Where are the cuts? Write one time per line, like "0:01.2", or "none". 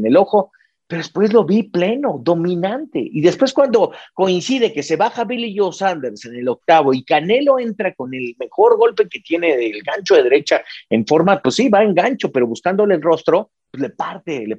none